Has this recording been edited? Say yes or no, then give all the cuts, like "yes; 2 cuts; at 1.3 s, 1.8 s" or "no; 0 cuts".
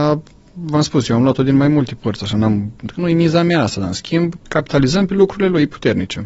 yes; 2 cuts; at 2.9 s, 4.4 s